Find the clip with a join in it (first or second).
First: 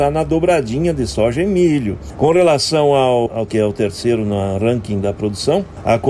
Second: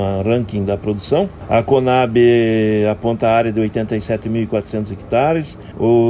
first